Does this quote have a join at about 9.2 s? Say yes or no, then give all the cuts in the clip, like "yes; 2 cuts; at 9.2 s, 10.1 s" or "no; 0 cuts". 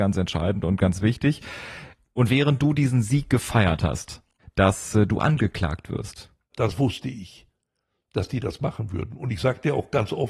no; 2 cuts; at 4.4 s, 6.5 s